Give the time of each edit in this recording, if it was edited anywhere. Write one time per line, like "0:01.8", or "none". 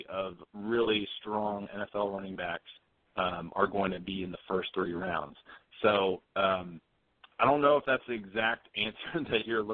none